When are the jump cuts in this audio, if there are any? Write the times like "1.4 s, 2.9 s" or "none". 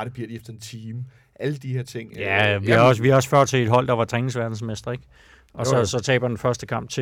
none